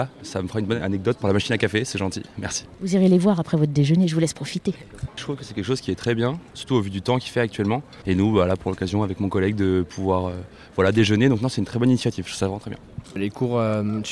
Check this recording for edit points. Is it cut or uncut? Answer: cut